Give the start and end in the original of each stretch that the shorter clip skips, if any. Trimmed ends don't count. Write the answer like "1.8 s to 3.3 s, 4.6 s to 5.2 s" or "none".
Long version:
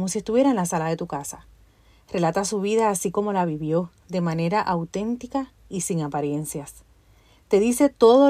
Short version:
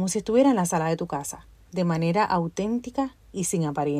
1.6 s to 4.0 s